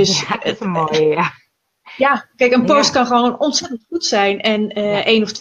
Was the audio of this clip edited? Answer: no; 0 cuts

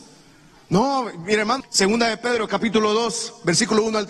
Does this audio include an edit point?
yes; 1 cut; at 1.6 s

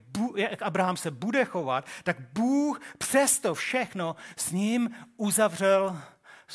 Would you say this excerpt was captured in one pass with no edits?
yes; 0 cuts

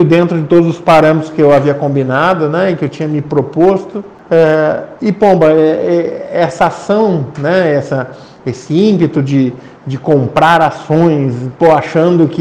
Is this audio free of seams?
yes; 0 cuts

